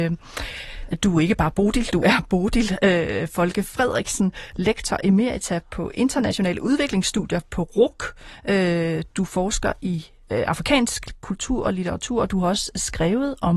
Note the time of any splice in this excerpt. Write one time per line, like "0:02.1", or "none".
none

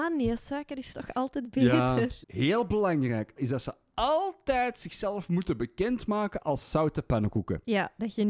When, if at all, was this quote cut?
0:02.2
0:03.4

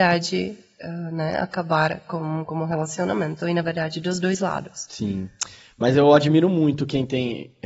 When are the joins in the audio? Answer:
none

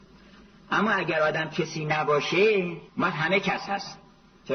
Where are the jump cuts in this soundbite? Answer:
0:02.9

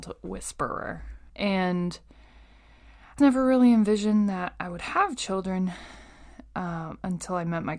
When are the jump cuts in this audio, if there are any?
0:01.3
0:03.2

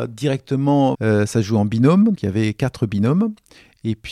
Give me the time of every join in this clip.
0:00.9
0:02.2

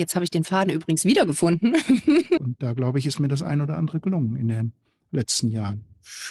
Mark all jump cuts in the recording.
0:02.4

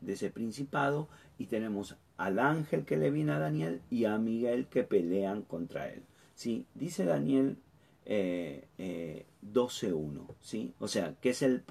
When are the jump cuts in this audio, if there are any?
0:10.8

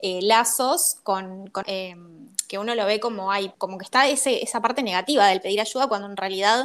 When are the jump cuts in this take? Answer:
0:01.6
0:03.5

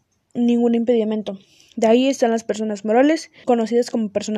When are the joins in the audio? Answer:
0:03.4

